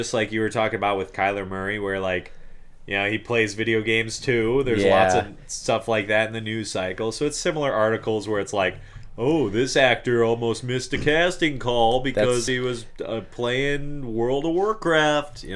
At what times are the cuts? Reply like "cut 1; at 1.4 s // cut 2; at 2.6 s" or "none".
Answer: none

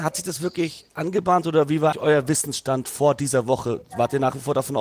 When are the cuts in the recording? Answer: cut 1; at 1.9 s

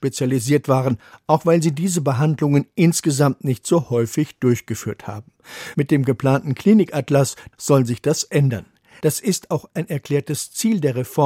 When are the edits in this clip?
cut 1; at 7.5 s // cut 2; at 9.0 s

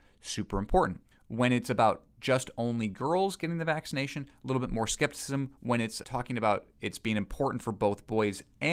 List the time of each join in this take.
cut 1; at 1.1 s // cut 2; at 6.0 s

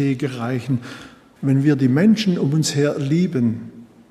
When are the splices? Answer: cut 1; at 1.4 s

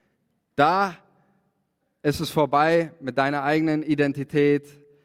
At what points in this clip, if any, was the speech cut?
none

